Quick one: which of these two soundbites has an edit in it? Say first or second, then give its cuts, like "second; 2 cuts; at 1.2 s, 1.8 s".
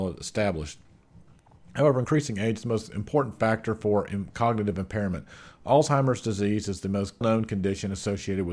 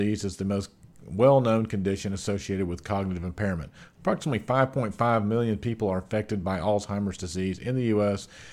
first; 1 cut; at 7.2 s